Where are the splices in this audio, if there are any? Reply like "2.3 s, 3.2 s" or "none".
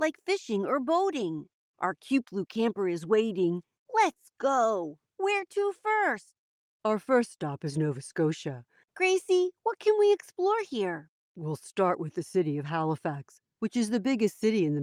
8.8 s

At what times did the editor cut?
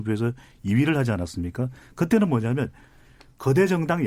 none

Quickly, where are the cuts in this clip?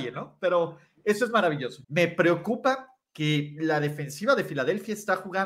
1.8 s

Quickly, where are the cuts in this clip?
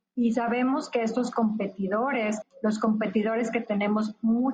2.4 s

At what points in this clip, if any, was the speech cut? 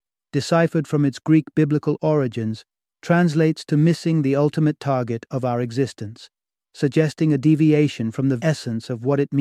8.4 s

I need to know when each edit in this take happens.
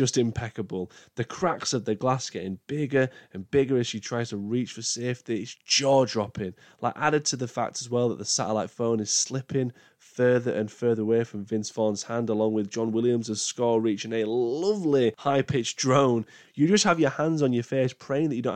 5.5 s

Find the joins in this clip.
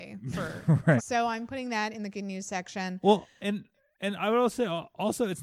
1.0 s

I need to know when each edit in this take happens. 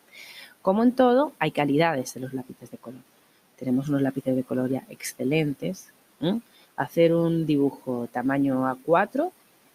6.6 s

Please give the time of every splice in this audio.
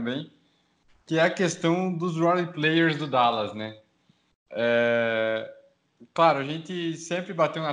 none

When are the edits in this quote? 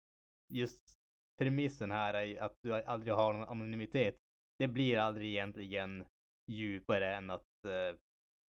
none

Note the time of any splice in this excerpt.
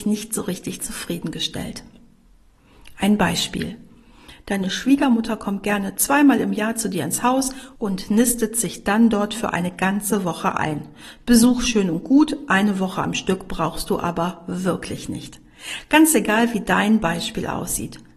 none

